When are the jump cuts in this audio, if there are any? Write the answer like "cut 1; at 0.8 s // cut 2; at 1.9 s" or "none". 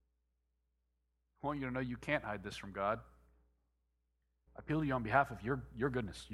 cut 1; at 4.5 s